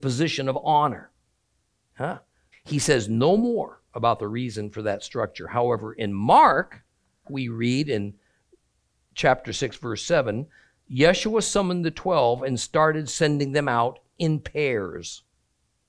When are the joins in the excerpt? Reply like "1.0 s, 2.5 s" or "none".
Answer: 2.5 s, 7.2 s